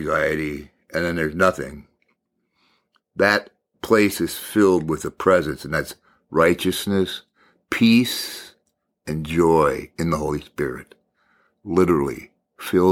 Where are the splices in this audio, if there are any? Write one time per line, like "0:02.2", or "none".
none